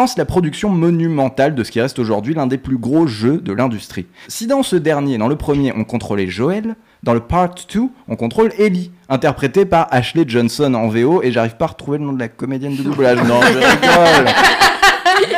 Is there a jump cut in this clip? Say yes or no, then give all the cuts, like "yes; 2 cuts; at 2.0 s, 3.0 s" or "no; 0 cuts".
yes; 1 cut; at 4.2 s